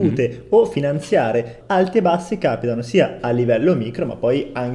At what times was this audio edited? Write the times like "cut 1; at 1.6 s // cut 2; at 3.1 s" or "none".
cut 1; at 1.6 s